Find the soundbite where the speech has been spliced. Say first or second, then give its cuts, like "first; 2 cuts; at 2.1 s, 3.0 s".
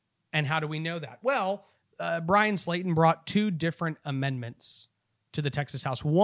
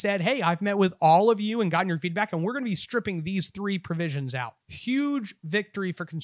second; 1 cut; at 4.6 s